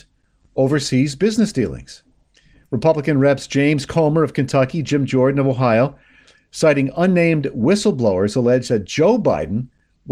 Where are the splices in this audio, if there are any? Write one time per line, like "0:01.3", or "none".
none